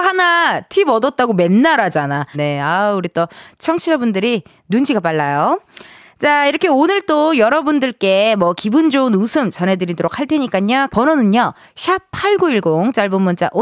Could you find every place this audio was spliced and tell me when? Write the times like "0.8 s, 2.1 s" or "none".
2.3 s, 10.9 s